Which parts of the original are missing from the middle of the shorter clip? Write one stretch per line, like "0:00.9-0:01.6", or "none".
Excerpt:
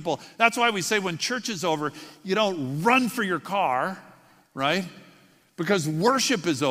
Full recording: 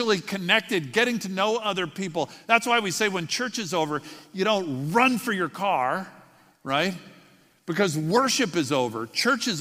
none